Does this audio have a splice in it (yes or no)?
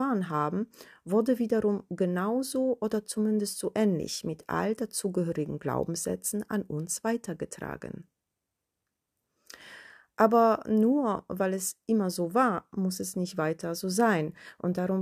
no